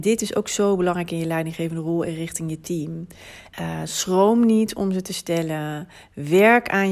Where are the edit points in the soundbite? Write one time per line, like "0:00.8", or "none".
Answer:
0:03.5